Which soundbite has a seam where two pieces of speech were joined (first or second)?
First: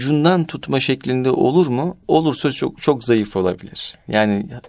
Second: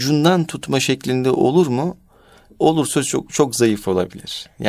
first